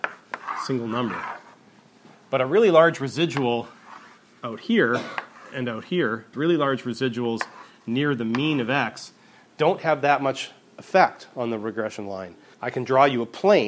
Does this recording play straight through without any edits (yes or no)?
no